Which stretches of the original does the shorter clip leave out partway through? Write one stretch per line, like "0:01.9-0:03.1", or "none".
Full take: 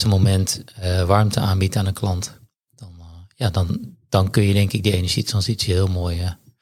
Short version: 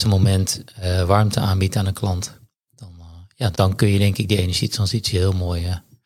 0:03.5-0:04.1